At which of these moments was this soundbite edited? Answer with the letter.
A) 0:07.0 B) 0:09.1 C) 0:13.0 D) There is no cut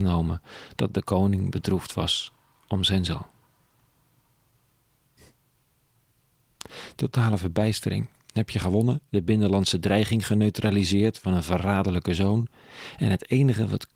B